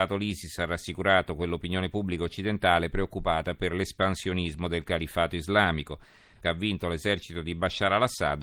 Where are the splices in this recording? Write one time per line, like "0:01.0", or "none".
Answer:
0:06.4

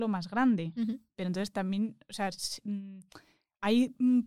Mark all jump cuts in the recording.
0:01.1

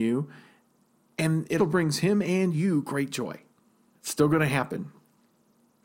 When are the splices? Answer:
0:01.6
0:03.9

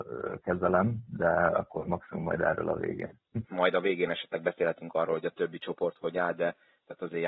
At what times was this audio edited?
0:03.4

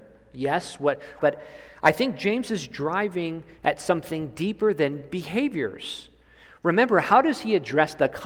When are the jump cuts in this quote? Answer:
0:01.2

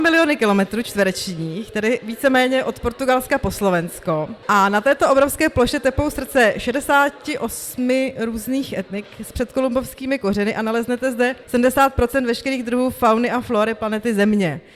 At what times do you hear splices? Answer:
0:11.4

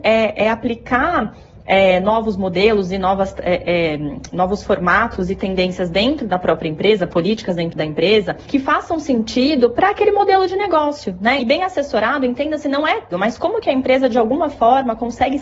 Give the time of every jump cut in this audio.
0:11.4
0:13.1

